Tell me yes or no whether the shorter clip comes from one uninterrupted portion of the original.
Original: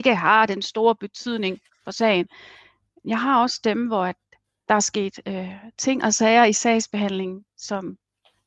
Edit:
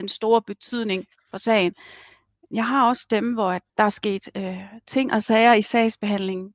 no